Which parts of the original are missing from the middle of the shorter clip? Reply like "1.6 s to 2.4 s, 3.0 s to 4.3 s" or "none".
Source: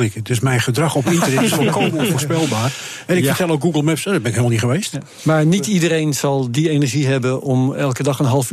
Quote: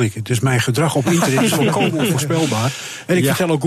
none